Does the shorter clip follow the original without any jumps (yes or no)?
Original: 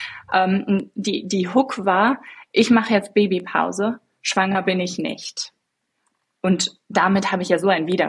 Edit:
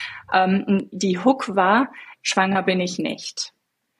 no